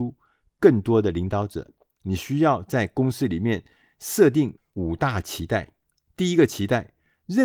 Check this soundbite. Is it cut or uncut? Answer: uncut